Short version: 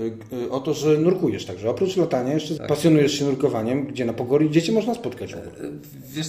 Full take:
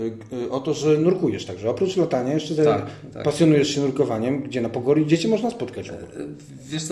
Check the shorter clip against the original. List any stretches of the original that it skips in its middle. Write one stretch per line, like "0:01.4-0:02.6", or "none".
0:02.6-0:03.1